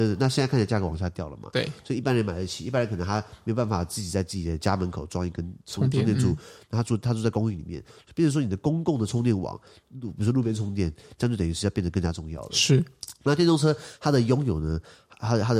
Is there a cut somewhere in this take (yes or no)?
no